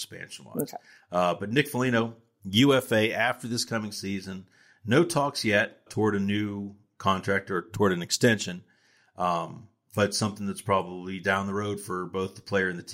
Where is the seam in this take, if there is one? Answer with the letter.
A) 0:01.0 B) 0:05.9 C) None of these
B